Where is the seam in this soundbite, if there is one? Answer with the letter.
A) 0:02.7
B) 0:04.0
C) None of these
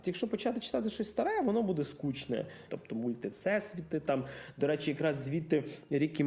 A